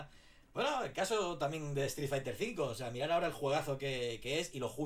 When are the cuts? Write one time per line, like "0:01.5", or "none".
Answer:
none